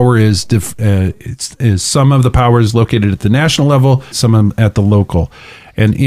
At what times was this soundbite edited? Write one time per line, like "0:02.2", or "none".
0:04.1